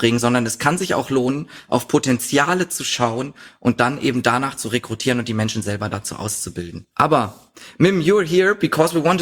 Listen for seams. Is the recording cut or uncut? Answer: cut